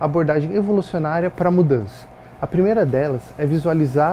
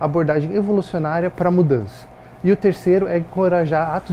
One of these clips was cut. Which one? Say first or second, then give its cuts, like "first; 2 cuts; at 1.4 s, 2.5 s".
first; 1 cut; at 2.4 s